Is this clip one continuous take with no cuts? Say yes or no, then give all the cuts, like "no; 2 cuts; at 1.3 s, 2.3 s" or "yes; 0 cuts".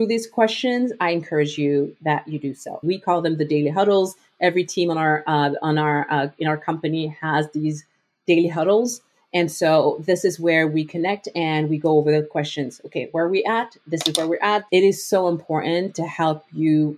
no; 2 cuts; at 2.8 s, 14.7 s